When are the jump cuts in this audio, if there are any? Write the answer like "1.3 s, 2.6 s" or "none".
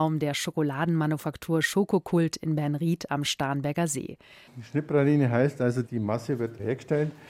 4.5 s, 5.9 s